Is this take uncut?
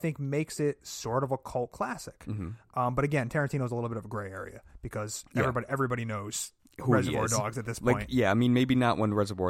yes; 0 cuts

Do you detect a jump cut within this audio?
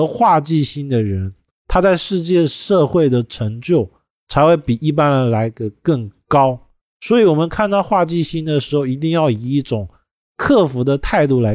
no; 0 cuts

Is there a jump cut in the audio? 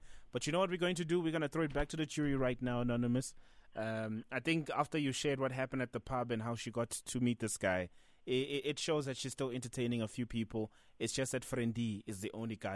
no; 0 cuts

